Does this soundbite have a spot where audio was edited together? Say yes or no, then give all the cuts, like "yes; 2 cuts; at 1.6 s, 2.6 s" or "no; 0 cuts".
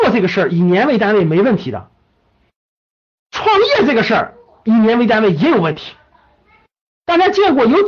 no; 0 cuts